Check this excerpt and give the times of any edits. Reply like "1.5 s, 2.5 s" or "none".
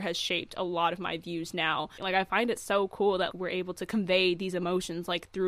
2.0 s, 3.3 s